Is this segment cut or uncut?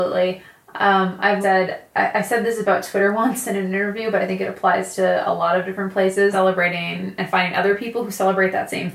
cut